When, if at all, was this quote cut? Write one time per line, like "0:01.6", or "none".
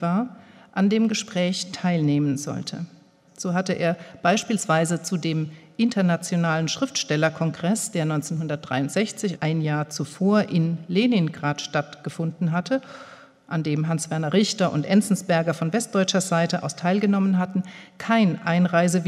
0:03.3
0:09.4